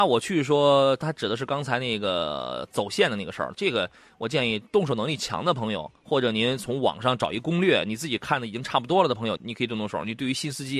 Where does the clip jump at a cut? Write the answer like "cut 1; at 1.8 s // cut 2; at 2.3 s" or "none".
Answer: cut 1; at 3.5 s // cut 2; at 9.4 s